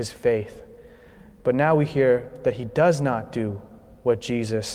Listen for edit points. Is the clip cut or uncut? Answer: uncut